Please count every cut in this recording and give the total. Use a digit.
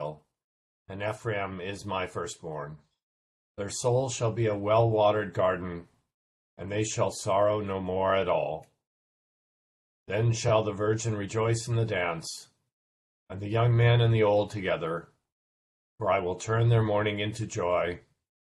1